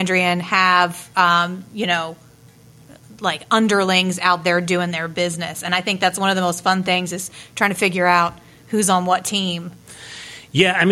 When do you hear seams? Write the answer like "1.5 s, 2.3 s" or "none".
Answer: none